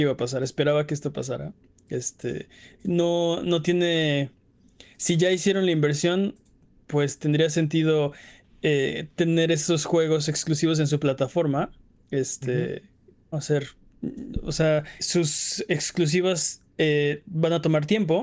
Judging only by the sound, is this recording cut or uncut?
cut